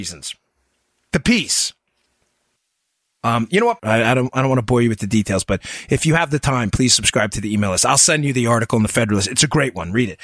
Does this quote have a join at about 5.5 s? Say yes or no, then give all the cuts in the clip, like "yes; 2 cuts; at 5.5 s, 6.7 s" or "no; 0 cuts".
no; 1 cut; at 3.8 s